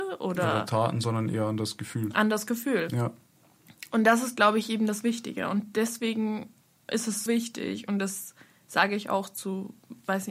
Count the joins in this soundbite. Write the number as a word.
one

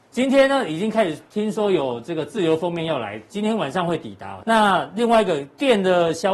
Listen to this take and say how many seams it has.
one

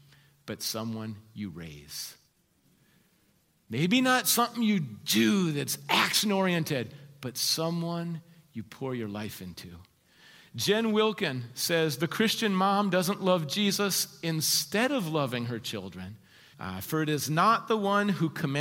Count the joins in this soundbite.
one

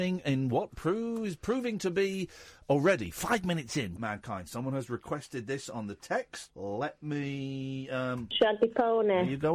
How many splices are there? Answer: two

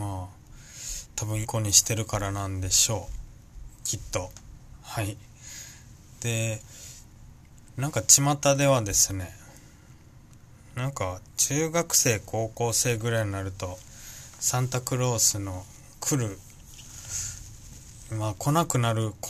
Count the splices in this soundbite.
one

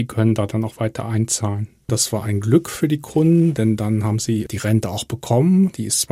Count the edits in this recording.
one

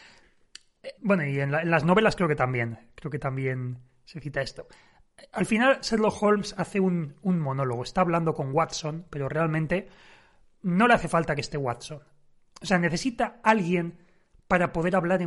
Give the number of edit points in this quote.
one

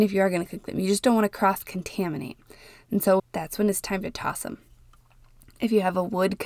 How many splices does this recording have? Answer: one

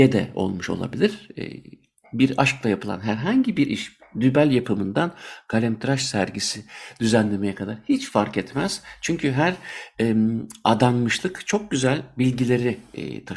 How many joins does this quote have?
zero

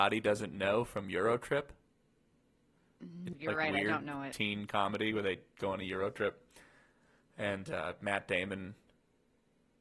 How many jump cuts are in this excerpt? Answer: one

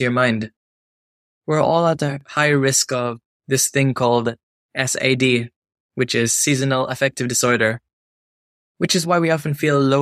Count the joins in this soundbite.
one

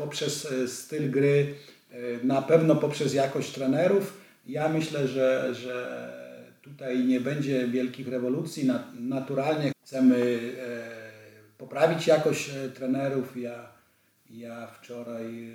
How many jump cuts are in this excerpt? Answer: one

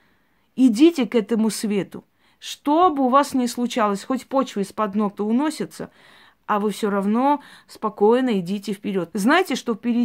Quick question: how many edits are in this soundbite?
two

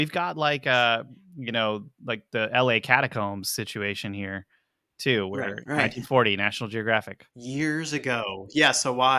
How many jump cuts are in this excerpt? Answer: two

